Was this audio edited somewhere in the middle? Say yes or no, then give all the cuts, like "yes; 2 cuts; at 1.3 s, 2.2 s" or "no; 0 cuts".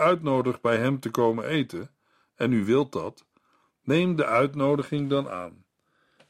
no; 0 cuts